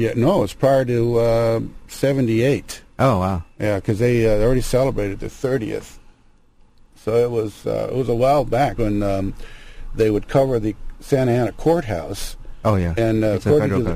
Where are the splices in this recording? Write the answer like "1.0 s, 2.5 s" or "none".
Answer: 8.8 s